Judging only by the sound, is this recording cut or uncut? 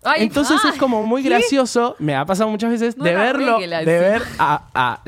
uncut